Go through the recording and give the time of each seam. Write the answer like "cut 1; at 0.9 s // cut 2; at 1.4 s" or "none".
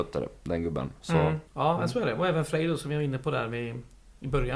cut 1; at 1.5 s